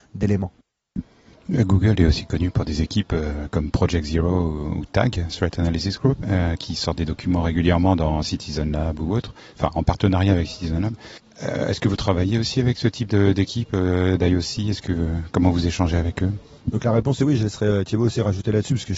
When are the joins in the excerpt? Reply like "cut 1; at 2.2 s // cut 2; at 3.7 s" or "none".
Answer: none